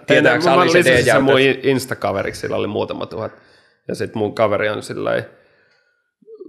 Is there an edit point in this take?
no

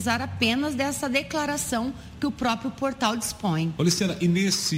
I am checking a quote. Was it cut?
yes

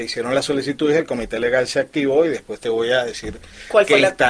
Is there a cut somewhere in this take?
no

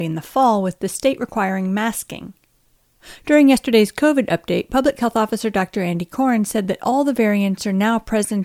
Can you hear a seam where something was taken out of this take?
no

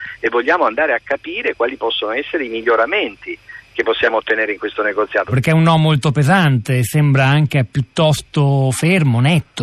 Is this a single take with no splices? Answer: no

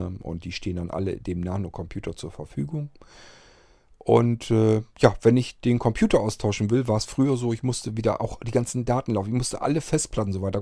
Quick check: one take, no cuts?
yes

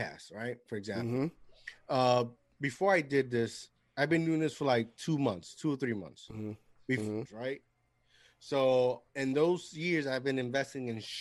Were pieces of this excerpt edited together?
yes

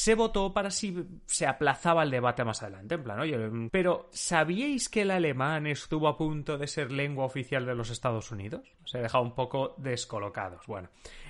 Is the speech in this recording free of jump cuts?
no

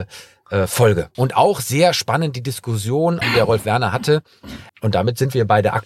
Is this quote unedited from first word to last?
no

